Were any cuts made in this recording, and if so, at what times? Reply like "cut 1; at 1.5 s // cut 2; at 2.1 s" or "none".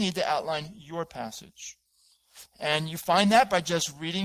cut 1; at 2.5 s